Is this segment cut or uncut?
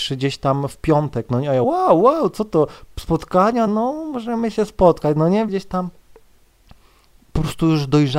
cut